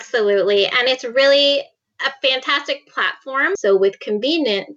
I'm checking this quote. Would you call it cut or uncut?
cut